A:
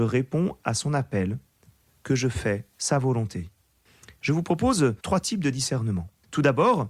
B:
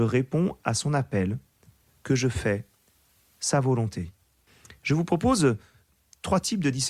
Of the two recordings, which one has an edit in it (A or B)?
A